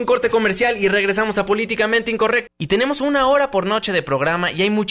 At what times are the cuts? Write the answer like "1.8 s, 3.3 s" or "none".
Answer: 2.5 s

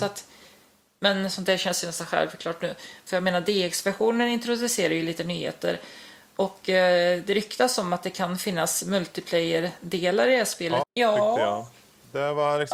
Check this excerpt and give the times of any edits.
3.1 s, 10.8 s

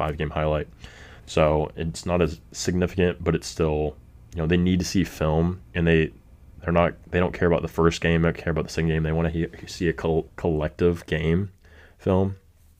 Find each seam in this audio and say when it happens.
1.2 s, 10.3 s

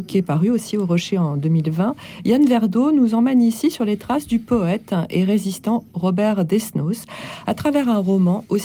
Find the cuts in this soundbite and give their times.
none

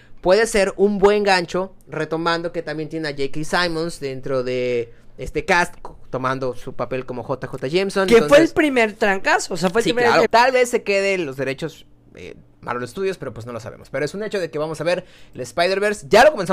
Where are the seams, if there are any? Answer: 10.2 s

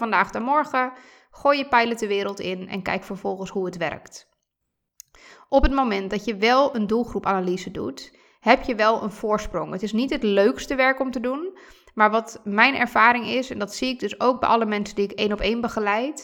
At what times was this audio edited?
none

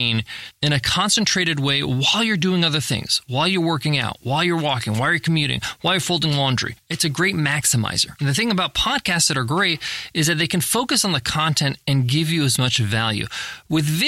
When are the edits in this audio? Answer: none

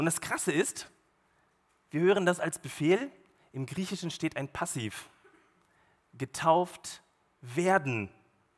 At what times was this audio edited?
none

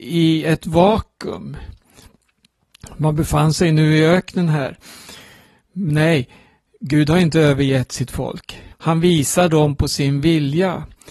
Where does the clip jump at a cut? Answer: 8.7 s

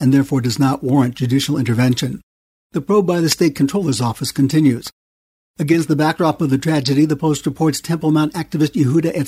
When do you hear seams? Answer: 2.6 s

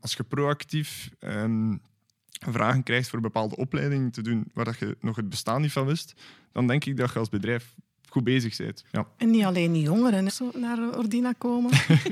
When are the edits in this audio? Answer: 8.8 s, 10.3 s

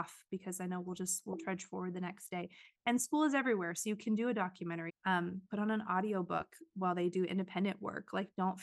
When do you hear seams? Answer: 4.9 s

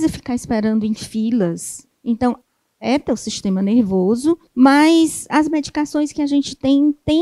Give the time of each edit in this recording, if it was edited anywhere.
1.9 s, 4.5 s

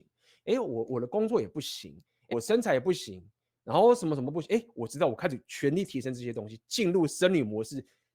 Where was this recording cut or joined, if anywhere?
2.3 s

